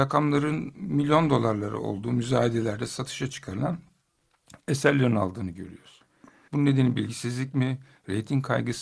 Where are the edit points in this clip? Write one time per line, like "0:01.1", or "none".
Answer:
0:06.5